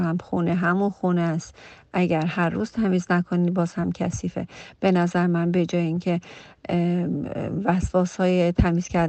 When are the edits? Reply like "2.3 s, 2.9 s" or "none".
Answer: none